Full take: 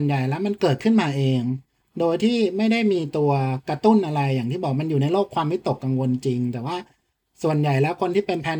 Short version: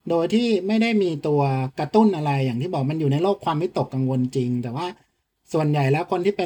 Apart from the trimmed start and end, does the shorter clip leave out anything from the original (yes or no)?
no